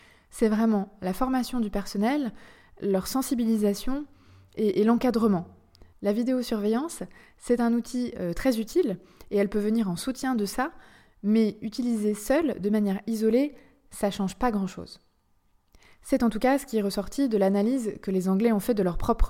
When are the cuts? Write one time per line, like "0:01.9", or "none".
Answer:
0:05.9